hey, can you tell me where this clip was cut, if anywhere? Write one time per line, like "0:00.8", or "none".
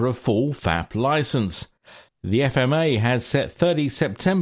none